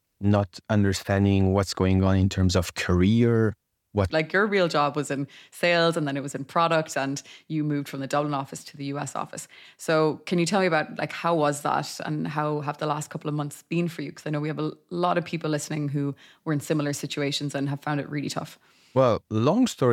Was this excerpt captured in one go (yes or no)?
no